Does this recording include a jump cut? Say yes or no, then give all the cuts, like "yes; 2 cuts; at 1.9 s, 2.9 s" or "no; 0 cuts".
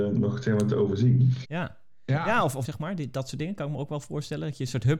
yes; 2 cuts; at 1.4 s, 2.6 s